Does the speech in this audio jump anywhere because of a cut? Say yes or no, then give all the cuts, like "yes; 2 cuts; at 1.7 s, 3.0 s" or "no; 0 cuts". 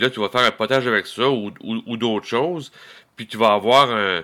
no; 0 cuts